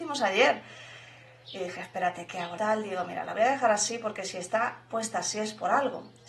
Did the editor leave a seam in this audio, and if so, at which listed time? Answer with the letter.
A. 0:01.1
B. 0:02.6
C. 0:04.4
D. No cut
B